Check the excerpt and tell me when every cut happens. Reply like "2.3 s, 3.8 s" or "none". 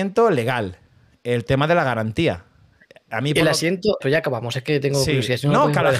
4.0 s